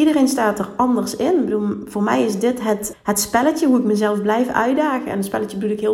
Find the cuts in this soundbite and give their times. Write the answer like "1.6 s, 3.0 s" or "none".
2.9 s